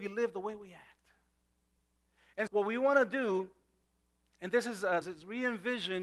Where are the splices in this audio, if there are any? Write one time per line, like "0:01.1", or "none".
0:02.5
0:05.0